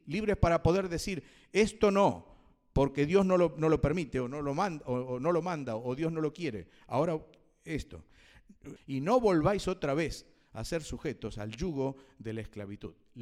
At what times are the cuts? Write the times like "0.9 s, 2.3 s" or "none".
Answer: 8.8 s